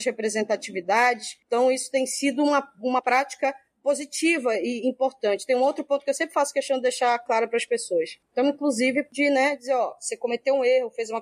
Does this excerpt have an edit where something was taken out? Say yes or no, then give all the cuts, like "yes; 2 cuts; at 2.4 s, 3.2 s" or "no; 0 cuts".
yes; 1 cut; at 8.2 s